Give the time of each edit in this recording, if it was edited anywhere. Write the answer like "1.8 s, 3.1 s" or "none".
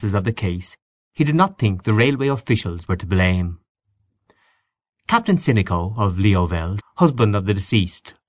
6.8 s